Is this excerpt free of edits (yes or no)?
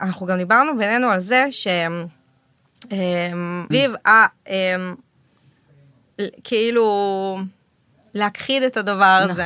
no